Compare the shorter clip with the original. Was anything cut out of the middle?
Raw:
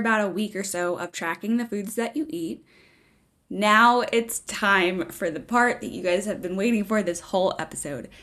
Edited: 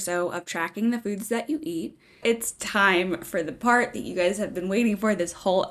yes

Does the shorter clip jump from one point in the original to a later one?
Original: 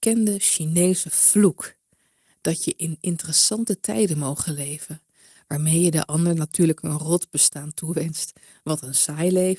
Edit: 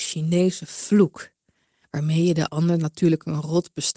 yes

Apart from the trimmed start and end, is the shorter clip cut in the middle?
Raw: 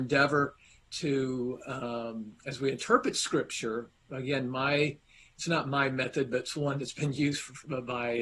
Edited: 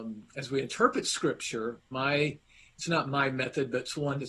yes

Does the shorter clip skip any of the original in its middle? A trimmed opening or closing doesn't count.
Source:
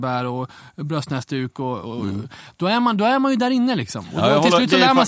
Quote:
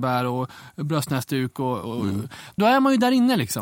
yes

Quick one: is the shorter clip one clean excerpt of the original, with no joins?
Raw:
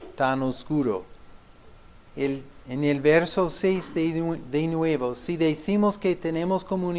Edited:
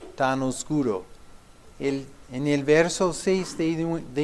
no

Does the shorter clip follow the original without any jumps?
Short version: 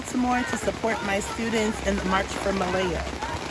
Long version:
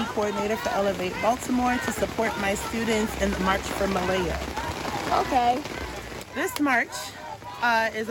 yes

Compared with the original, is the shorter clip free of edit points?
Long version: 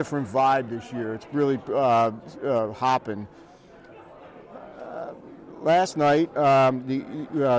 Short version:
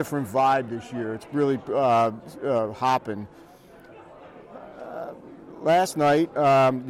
yes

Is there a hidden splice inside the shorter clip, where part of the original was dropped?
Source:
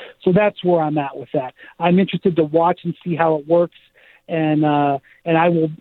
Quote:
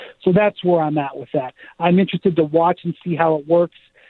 no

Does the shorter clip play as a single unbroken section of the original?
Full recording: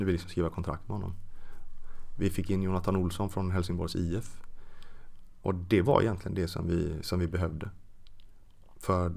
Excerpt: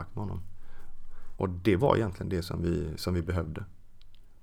no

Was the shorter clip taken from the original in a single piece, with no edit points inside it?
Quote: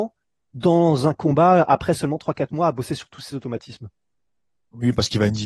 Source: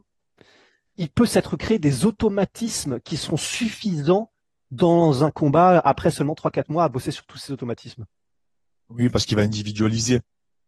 yes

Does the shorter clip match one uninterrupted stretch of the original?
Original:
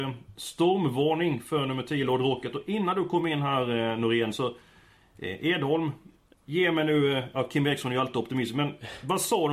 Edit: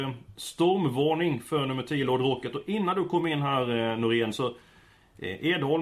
yes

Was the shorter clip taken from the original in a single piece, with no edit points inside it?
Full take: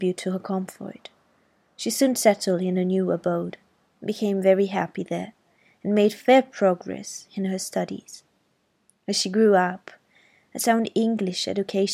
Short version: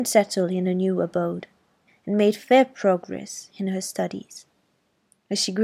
no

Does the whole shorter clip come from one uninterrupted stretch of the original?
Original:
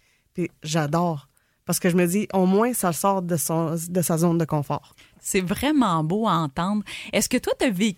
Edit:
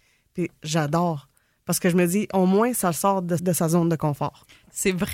no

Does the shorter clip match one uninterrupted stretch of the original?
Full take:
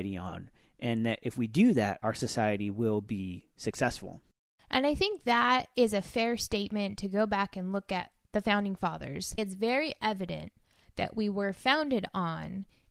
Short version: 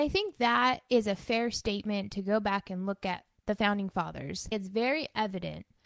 yes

